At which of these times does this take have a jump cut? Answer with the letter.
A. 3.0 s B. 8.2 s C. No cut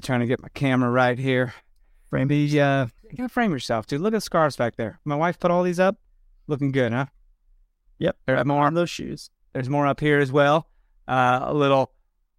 A